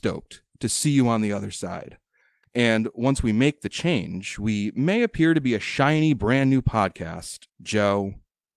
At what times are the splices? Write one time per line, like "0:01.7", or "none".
0:02.4
0:07.5